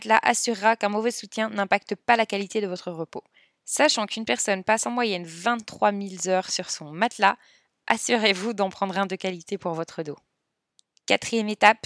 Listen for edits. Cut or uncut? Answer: uncut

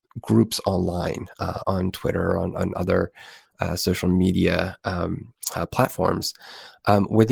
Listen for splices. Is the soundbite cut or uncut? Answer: cut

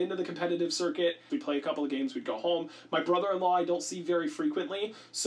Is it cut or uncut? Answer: cut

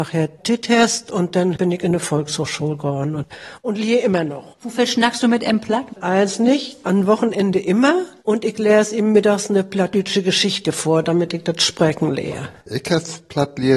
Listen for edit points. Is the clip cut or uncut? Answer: cut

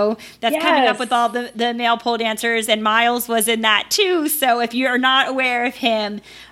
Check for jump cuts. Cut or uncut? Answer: uncut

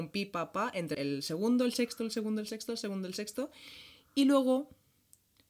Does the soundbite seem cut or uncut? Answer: cut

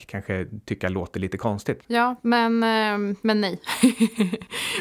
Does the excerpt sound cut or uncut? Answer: cut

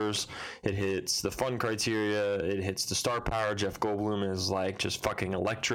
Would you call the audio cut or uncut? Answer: uncut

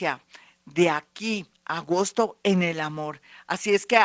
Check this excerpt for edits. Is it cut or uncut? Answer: uncut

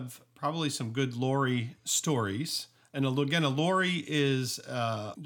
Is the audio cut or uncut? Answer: uncut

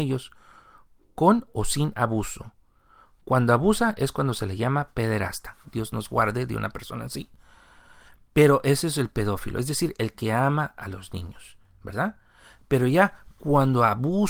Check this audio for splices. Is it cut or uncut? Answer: cut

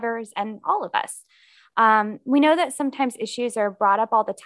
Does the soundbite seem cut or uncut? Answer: uncut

